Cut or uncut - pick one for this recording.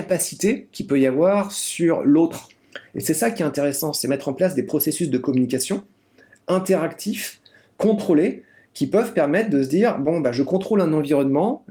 uncut